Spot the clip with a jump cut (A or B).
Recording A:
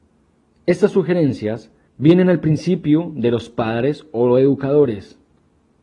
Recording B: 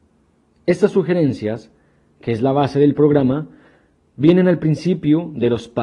A